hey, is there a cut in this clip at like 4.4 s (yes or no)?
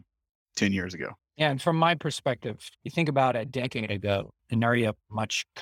yes